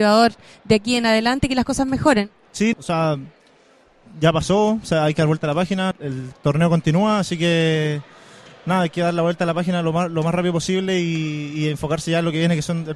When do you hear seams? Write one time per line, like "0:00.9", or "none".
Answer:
0:02.7
0:05.9